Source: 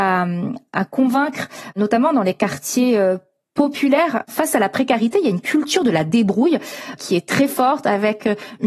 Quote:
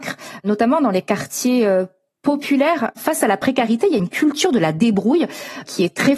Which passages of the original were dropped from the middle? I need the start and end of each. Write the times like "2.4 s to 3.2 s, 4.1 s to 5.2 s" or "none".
none